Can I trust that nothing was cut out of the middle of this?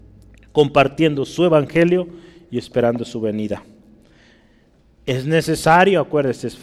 yes; 0 cuts

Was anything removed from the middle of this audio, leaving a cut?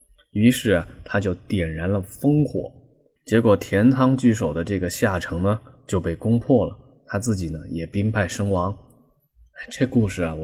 yes; 1 cut; at 3.2 s

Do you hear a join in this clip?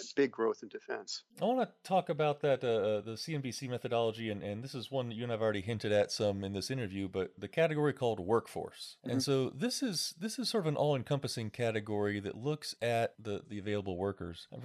yes; 2 cuts; at 1.3 s, 13.4 s

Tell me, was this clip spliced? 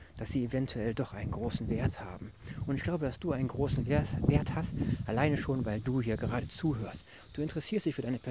no; 0 cuts

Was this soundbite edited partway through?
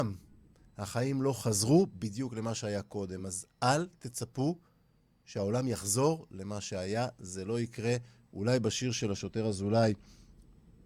no; 0 cuts

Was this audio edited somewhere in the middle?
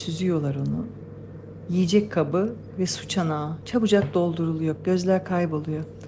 yes; 1 cut; at 4.8 s

